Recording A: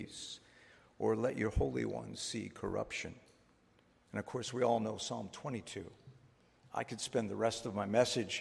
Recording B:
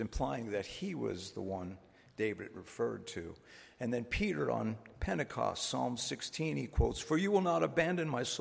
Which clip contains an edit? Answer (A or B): A